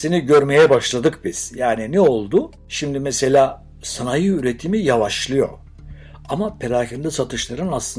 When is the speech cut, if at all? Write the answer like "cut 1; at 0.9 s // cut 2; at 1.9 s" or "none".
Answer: none